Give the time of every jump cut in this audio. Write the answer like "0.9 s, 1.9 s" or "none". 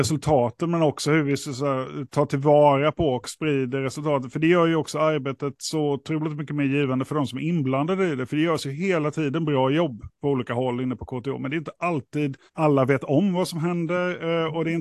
12.5 s